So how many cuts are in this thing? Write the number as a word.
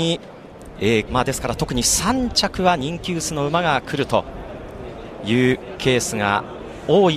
one